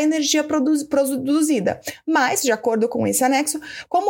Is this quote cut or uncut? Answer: uncut